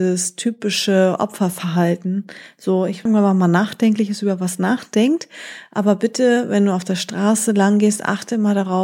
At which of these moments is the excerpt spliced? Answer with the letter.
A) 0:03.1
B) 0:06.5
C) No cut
A